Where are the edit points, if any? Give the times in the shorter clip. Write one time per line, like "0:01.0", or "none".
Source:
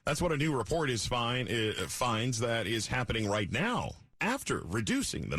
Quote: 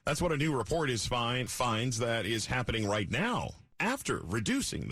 0:01.5

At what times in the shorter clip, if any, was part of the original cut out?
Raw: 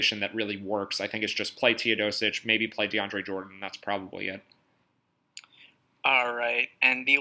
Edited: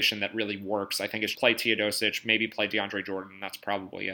0:01.3

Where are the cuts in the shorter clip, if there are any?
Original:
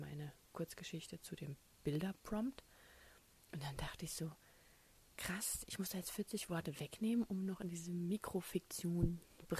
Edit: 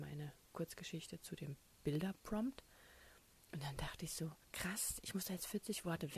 0:04.4

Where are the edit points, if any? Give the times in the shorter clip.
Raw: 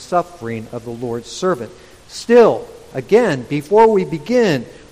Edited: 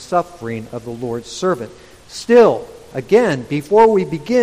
none

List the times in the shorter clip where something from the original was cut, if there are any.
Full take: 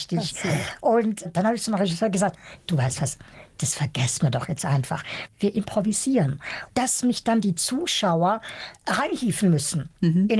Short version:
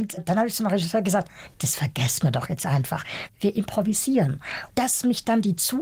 0:01.5

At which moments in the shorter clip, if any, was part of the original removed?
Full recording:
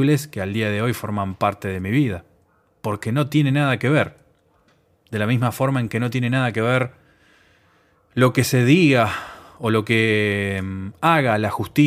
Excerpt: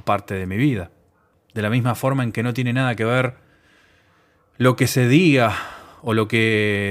0:01.3

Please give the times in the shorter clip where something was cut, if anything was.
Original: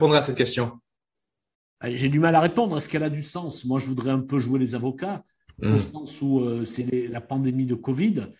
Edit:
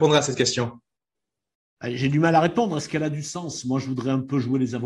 none

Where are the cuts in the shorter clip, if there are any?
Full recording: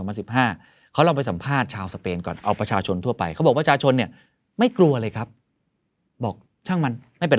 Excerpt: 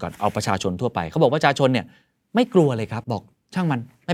0:03.0

